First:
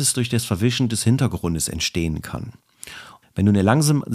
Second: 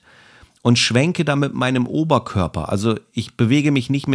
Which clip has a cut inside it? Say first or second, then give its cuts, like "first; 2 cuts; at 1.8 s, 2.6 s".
first; 1 cut; at 3.2 s